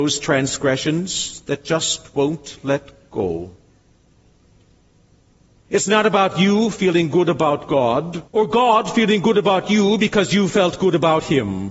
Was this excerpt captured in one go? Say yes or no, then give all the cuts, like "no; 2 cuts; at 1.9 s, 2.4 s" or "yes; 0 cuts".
no; 2 cuts; at 5.6 s, 8.3 s